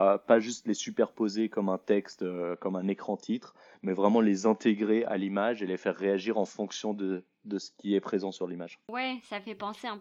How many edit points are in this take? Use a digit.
0